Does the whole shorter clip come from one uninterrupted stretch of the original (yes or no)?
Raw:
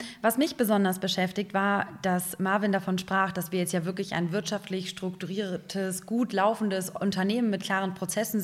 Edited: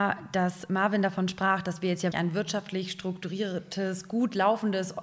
no